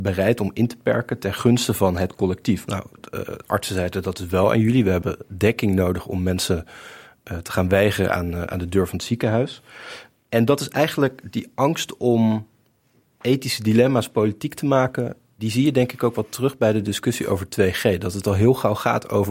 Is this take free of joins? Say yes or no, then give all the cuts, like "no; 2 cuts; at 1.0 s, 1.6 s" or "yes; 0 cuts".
no; 1 cut; at 2.7 s